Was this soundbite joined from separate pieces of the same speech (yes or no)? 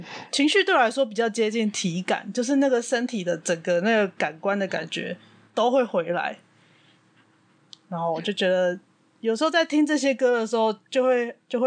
no